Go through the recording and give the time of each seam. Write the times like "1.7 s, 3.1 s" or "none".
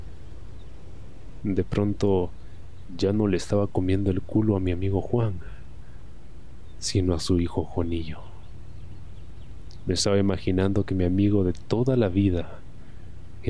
1.4 s